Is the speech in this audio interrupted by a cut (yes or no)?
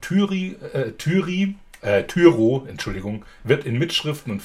yes